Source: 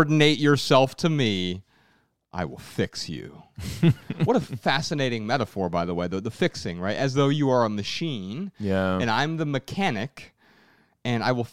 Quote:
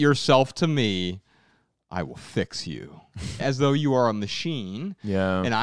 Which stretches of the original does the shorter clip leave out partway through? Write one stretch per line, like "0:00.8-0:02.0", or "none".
0:03.8-0:06.9